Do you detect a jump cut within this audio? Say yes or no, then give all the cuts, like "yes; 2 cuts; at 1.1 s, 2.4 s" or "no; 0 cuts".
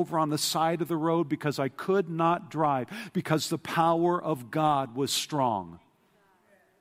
yes; 1 cut; at 5.1 s